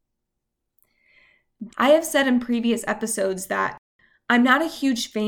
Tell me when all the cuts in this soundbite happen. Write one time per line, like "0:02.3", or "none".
0:01.7